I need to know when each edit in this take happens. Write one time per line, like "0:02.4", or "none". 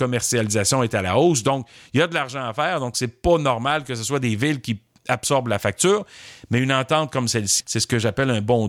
0:07.6